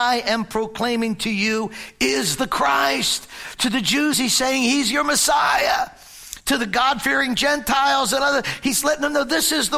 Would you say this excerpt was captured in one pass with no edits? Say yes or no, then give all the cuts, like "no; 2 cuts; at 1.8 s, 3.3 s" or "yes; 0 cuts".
yes; 0 cuts